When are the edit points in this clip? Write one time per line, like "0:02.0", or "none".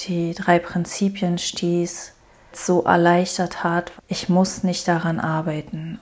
0:02.5
0:04.0